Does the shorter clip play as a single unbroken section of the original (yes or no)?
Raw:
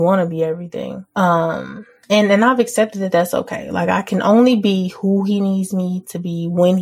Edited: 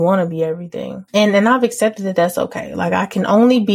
no